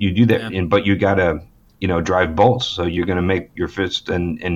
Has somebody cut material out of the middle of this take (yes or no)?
no